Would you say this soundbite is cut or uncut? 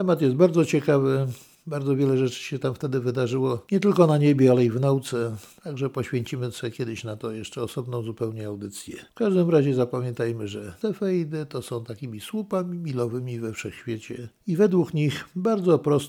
uncut